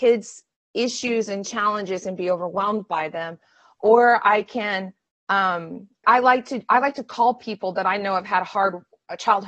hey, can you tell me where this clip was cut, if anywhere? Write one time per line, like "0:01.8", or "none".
0:06.0